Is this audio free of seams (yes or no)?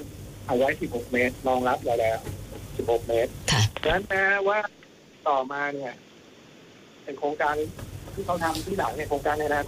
yes